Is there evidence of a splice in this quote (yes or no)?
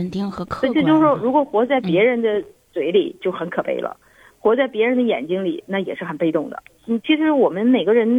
yes